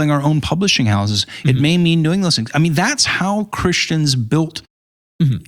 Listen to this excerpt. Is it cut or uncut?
uncut